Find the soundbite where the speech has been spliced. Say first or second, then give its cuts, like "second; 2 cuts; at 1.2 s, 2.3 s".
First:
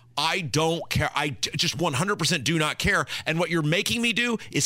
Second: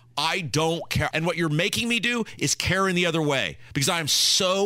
second; 1 cut; at 1.1 s